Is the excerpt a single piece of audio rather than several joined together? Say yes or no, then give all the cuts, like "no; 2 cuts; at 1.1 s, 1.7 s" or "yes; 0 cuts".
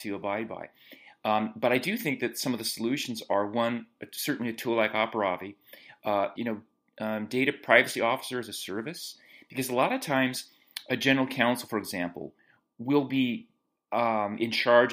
no; 1 cut; at 6.4 s